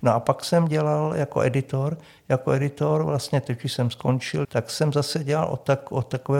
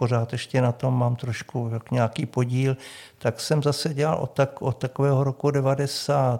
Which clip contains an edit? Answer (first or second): first